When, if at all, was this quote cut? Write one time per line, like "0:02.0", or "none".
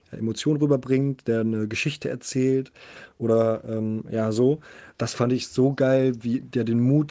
none